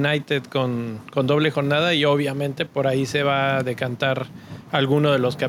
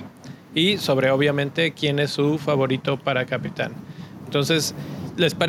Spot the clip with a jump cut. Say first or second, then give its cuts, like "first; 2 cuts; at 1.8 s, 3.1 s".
first; 1 cut; at 2.7 s